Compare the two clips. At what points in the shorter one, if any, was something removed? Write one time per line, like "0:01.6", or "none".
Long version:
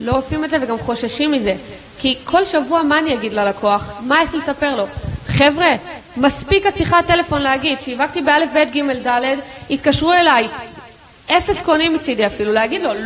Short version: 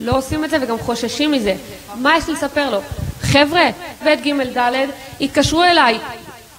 0:01.9
0:04.0